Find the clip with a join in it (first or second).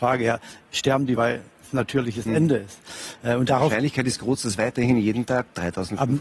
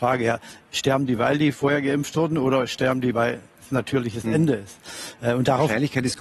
first